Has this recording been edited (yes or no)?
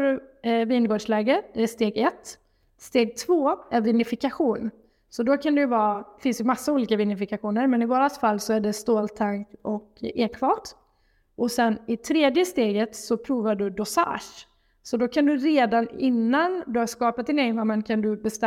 no